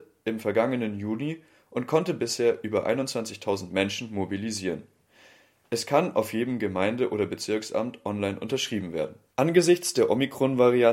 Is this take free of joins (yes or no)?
no